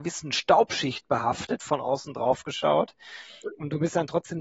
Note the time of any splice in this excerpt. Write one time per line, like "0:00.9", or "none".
none